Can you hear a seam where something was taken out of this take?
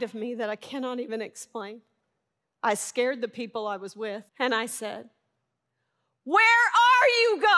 yes; 2 cuts; at 2.4 s, 4.3 s

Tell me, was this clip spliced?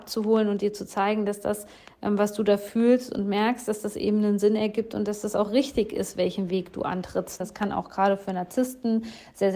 yes; 1 cut; at 7.4 s

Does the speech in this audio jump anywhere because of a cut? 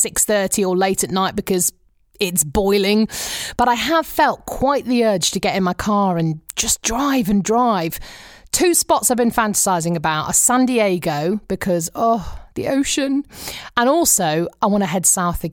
no; 0 cuts

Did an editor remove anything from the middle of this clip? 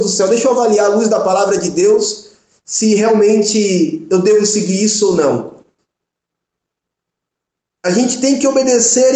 no; 0 cuts

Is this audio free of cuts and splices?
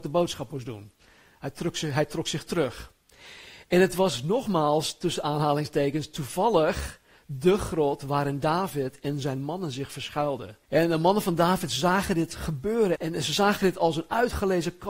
no; 2 cuts; at 10.6 s, 13.0 s

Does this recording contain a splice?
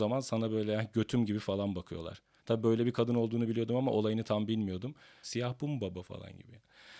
yes; 2 cuts; at 2.4 s, 5.2 s

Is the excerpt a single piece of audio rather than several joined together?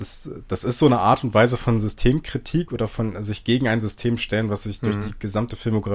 yes; 0 cuts

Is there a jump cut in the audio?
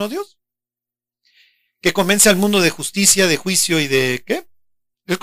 no; 0 cuts

